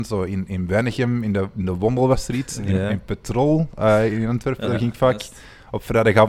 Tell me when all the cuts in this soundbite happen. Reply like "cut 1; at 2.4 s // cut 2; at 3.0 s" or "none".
none